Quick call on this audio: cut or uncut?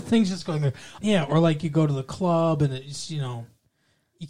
cut